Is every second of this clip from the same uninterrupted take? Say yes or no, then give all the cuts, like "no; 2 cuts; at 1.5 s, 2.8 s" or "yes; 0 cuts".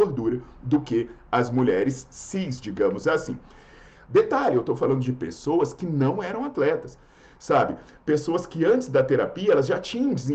no; 1 cut; at 4.1 s